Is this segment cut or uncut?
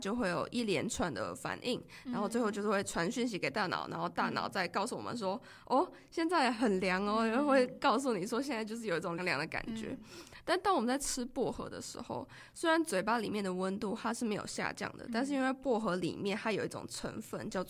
cut